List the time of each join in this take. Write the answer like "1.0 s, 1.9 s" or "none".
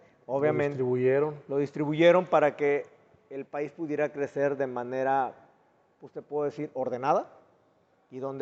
none